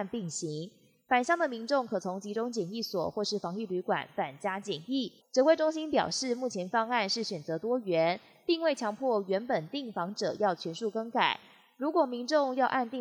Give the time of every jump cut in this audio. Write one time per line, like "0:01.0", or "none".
0:05.2